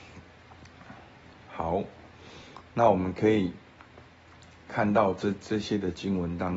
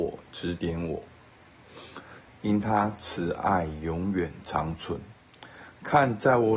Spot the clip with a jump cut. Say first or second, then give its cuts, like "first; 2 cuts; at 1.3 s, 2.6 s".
second; 1 cut; at 2.3 s